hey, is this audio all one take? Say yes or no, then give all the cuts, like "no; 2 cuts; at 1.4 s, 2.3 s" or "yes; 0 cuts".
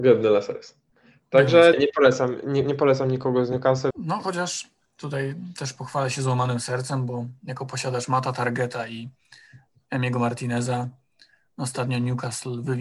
no; 2 cuts; at 1.7 s, 3.9 s